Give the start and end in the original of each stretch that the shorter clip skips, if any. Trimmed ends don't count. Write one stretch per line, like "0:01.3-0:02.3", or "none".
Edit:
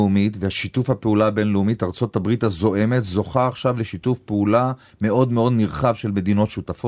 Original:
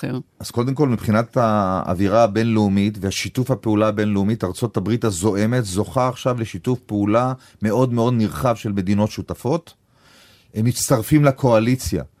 none